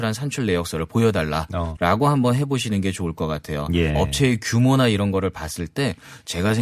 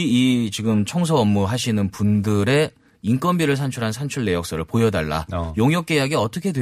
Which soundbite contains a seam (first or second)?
first